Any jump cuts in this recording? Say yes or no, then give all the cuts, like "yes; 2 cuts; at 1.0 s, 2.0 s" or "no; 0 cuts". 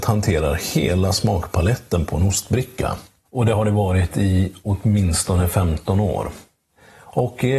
yes; 1 cut; at 3.2 s